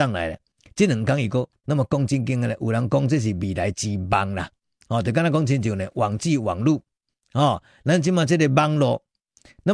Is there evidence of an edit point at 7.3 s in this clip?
no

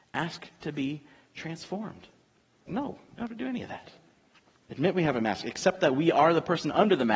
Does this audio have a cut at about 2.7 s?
yes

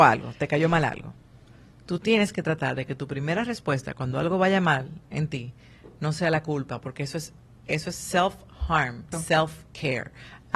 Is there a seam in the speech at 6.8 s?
no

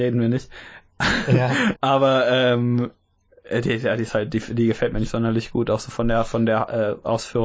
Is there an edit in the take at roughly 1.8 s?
yes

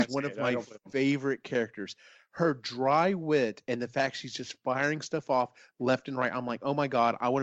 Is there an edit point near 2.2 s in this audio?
no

